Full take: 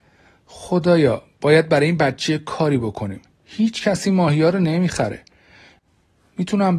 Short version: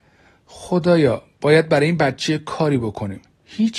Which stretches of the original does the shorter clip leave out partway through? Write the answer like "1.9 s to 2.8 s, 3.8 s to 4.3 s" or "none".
none